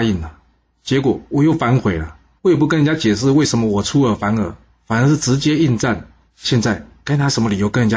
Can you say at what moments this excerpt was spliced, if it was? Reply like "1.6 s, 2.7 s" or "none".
2.4 s, 6.3 s